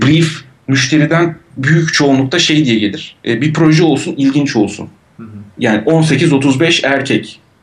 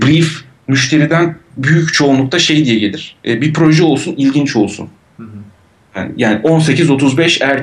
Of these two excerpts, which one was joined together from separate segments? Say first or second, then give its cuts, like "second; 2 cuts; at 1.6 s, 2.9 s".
first; 1 cut; at 5.6 s